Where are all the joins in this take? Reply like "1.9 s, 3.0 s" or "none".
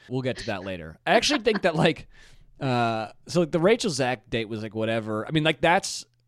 none